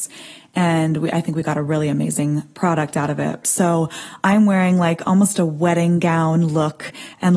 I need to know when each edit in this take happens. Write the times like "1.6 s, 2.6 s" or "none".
3.4 s